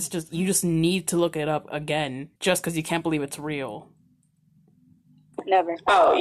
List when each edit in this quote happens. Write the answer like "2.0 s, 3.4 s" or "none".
2.4 s